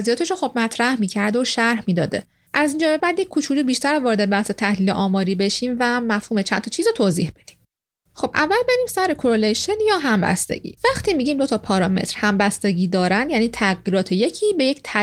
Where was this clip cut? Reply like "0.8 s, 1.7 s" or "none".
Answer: 3.0 s